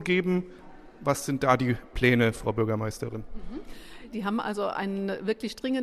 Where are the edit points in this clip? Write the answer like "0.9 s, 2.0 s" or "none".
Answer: 4.1 s